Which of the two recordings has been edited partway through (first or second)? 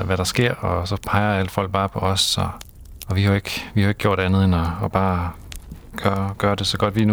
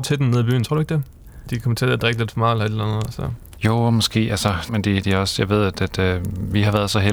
second